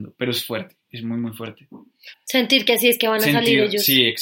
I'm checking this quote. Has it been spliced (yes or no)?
yes